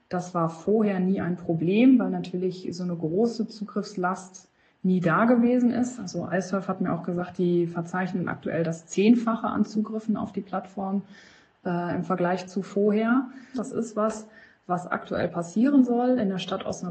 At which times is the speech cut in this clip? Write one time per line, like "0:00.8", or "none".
0:13.5